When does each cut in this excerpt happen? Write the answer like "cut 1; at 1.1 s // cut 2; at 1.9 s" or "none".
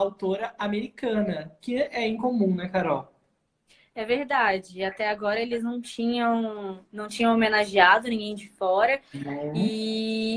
cut 1; at 9.1 s